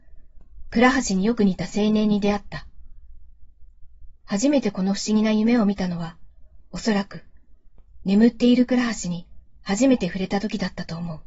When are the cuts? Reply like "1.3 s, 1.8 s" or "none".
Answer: 4.2 s